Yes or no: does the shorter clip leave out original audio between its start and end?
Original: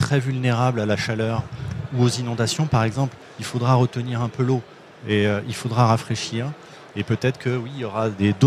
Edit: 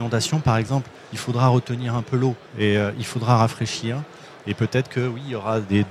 yes